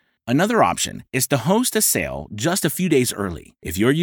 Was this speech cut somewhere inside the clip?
no; 0 cuts

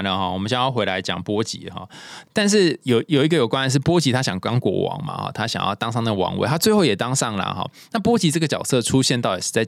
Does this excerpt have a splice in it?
yes; 1 cut; at 2.2 s

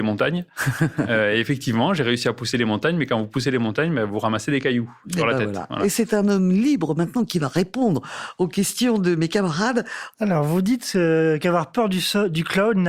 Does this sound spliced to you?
yes; 1 cut; at 10.1 s

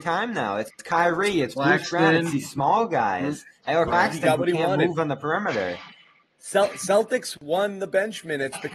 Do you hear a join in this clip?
no; 0 cuts

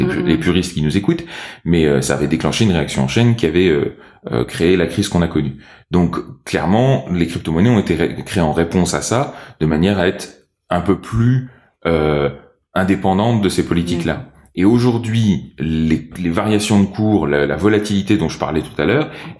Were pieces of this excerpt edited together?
no; 0 cuts

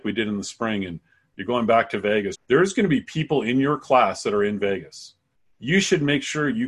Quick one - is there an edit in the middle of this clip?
yes; 1 cut; at 2.3 s

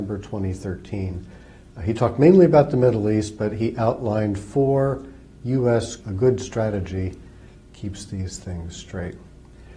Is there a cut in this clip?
yes; 1 cut; at 6.0 s

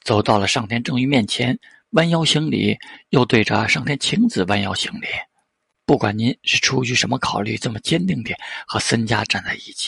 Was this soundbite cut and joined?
yes; 1 cut; at 5.7 s

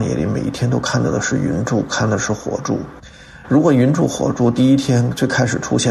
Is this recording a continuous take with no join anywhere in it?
yes; 0 cuts

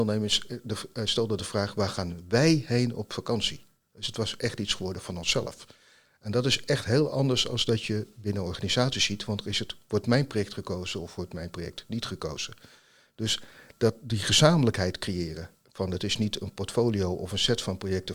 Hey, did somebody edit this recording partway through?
no; 0 cuts

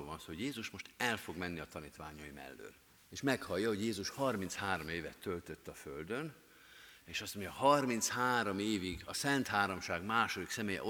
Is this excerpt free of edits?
no; 2 cuts; at 3.0 s, 7.0 s

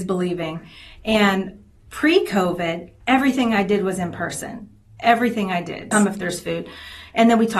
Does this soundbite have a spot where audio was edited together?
yes; 1 cut; at 5.9 s

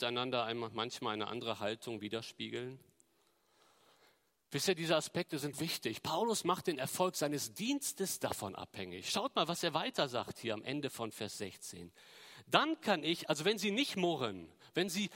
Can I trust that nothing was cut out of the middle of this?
no; 1 cut; at 5.5 s

